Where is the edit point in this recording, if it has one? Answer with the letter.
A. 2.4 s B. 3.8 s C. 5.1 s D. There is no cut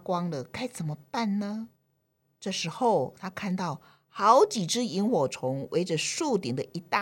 A